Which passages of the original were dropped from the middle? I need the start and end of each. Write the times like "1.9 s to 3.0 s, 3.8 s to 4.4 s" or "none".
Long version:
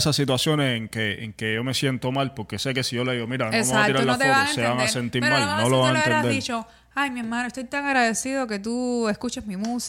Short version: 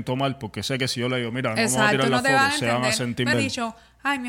5.3 s to 6.2 s